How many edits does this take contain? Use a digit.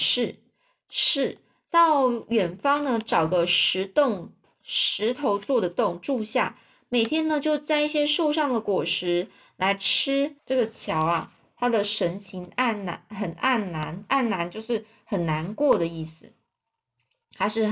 1